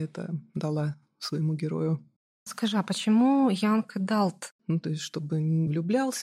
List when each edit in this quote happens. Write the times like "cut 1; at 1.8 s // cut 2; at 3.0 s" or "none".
cut 1; at 4.5 s